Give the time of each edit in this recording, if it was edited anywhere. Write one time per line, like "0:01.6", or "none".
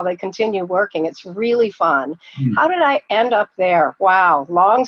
none